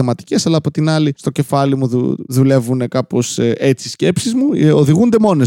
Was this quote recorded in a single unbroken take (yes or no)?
yes